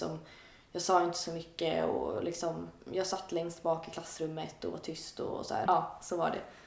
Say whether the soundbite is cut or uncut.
cut